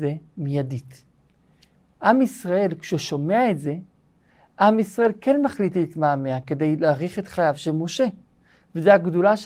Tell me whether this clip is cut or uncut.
uncut